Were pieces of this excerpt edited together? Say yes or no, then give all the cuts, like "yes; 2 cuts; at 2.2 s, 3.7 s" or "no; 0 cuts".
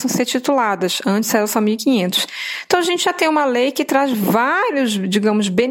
no; 0 cuts